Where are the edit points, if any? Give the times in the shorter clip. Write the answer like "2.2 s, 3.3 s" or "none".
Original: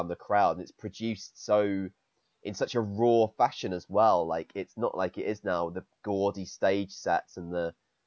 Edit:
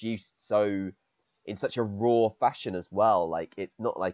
none